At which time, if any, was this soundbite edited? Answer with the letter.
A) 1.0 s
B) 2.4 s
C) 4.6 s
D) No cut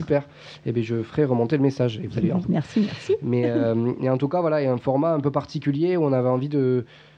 B